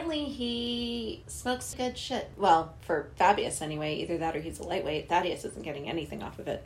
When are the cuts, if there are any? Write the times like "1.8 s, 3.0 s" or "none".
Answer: 1.7 s